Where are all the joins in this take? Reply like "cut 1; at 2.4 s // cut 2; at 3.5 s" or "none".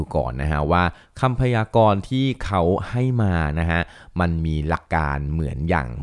cut 1; at 4.8 s